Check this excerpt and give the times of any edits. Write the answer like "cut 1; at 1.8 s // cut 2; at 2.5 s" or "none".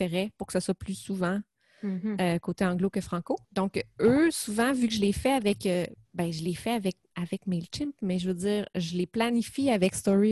cut 1; at 3.4 s